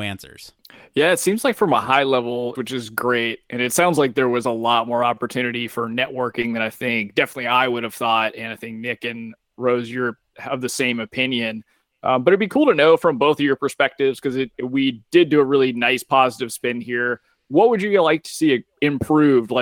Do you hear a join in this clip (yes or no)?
yes